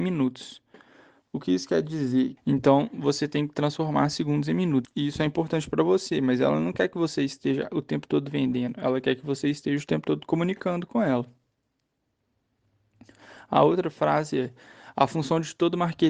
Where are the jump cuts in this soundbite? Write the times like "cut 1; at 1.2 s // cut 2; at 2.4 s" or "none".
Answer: cut 1; at 2.4 s // cut 2; at 4.8 s